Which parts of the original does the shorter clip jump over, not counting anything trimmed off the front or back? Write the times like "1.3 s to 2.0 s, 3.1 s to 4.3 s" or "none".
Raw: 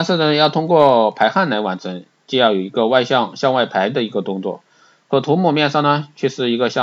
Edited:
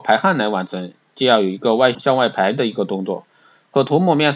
3.1 s to 3.3 s